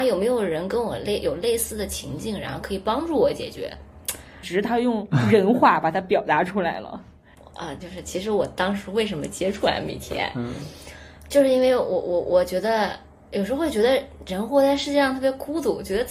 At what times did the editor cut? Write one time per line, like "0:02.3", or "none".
0:04.4
0:07.8